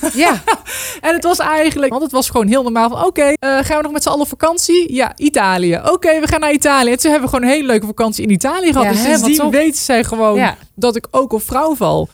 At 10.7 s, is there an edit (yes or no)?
no